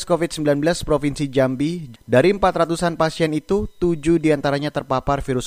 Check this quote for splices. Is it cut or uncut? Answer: cut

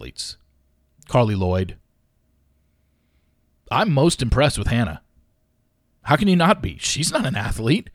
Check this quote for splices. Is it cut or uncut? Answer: uncut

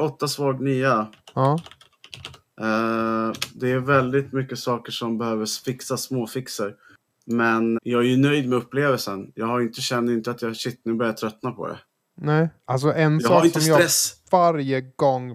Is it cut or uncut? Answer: cut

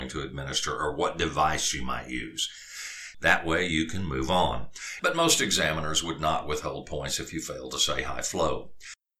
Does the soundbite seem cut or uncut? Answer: cut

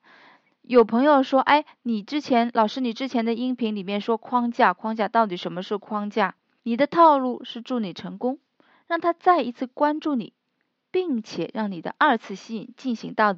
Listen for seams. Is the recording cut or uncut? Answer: cut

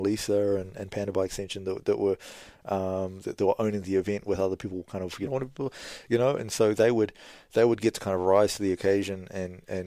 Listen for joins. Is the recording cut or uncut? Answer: cut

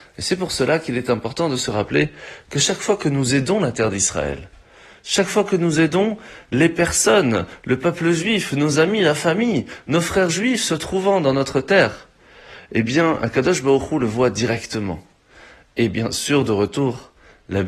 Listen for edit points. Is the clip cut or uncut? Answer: uncut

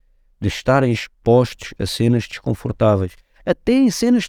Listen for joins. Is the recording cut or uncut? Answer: uncut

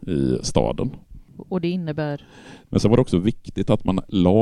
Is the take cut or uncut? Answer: cut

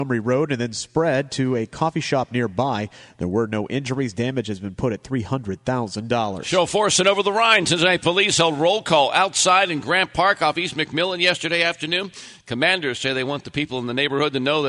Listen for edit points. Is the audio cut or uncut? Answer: uncut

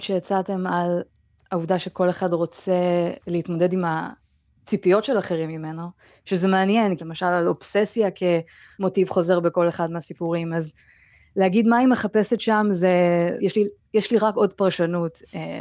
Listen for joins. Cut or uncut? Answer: cut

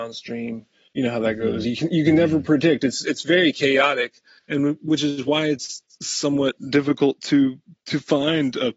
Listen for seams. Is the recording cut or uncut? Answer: uncut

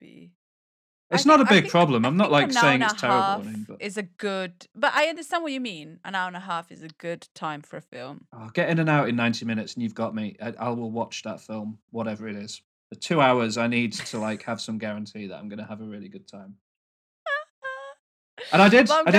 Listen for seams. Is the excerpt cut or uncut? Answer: uncut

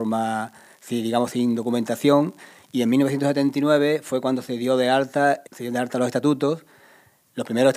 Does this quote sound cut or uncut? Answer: cut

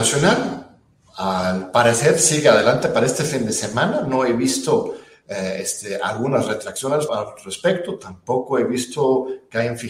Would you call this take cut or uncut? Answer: cut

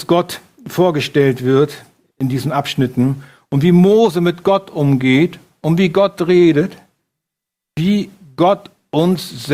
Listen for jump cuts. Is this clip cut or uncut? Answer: cut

